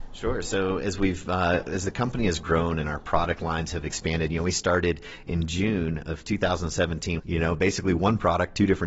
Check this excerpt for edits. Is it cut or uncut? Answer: cut